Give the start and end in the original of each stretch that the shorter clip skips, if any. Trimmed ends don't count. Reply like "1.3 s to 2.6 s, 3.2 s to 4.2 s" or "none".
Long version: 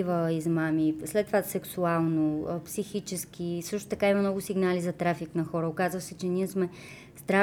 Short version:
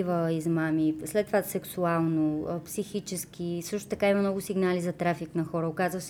none